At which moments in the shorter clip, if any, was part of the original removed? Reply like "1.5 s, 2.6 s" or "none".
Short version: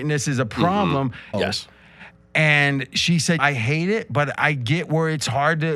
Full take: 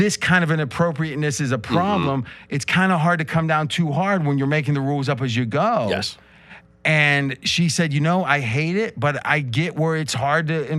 1.3 s, 3.4 s